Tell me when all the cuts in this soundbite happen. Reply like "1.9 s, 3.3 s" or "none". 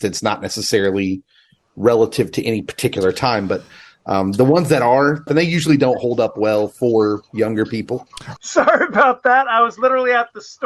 5.3 s, 8.4 s